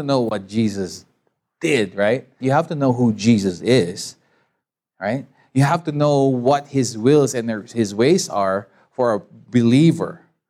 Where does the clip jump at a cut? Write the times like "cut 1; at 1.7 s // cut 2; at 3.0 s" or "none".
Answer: cut 1; at 2.4 s